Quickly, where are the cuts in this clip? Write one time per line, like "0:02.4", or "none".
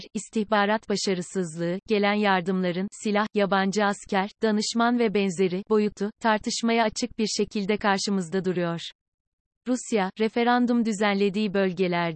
0:09.5

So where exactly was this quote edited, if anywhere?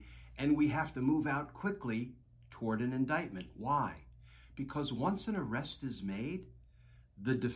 none

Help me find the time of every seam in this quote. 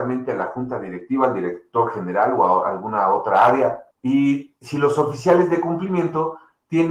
0:03.9

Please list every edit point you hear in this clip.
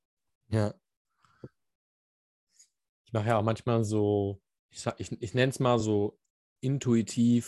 none

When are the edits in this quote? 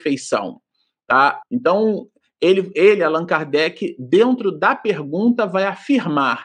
0:01.4

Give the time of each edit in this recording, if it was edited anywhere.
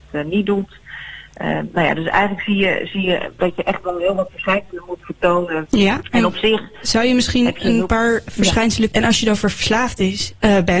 0:05.7
0:08.9

